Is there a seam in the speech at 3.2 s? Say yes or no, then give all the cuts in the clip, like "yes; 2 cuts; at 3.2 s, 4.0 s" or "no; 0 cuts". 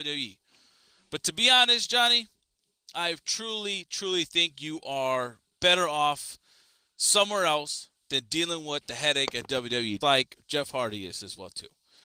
no; 1 cut; at 10.0 s